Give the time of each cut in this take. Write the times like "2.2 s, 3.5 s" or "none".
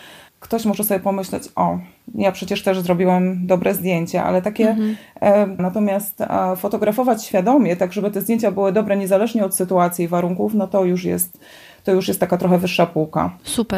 5.6 s